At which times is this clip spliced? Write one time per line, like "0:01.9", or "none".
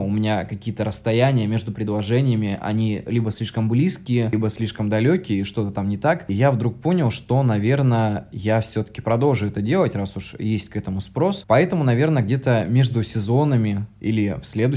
none